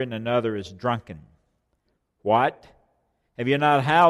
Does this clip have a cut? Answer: no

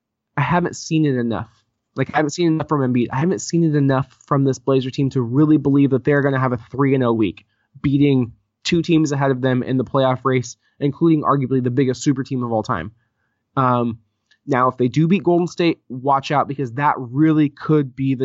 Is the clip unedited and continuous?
yes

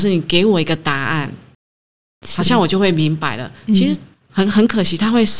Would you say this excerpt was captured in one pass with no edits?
yes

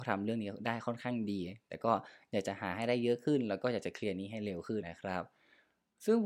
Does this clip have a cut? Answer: yes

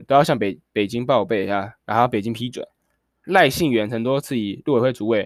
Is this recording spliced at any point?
yes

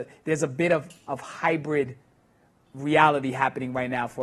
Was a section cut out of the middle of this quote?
yes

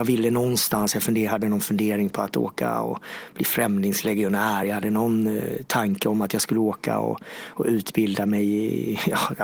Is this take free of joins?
yes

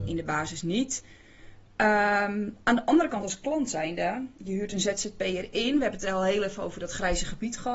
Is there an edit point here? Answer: no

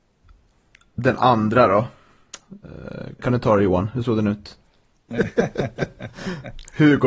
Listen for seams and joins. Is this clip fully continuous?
no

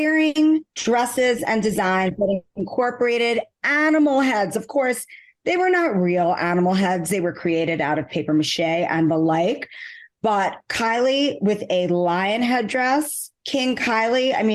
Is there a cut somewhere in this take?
no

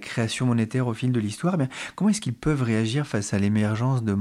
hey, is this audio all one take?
yes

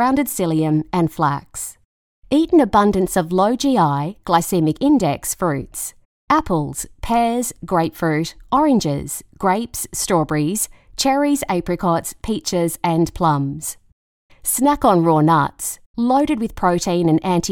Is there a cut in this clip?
no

